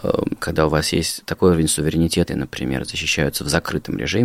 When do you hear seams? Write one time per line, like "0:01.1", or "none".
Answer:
0:02.3